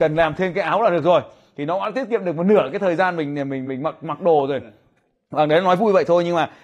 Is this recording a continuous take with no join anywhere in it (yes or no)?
yes